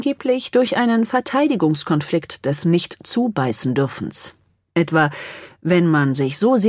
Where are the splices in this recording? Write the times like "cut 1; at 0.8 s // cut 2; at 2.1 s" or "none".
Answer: none